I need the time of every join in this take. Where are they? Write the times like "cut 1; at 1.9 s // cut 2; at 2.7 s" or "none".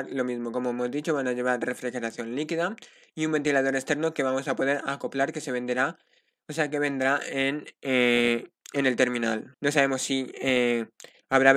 cut 1; at 9.5 s